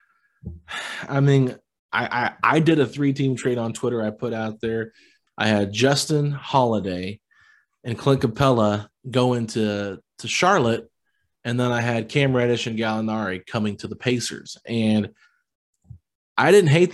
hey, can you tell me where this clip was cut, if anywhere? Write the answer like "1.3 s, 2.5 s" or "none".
5.3 s, 9.0 s